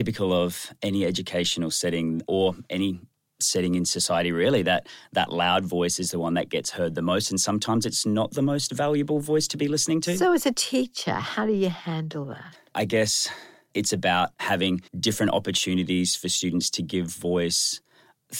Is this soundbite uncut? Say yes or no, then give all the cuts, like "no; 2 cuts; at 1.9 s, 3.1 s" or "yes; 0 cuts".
no; 2 cuts; at 2.3 s, 14.9 s